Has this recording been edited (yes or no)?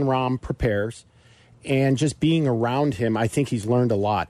no